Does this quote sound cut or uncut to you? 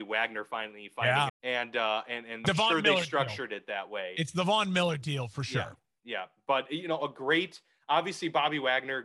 cut